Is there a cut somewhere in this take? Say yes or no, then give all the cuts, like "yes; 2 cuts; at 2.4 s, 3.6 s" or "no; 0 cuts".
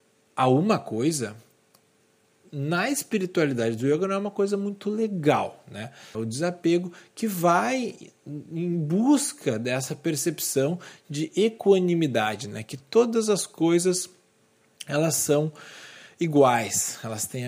yes; 1 cut; at 6.1 s